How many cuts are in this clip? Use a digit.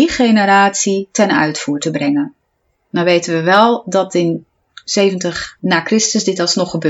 1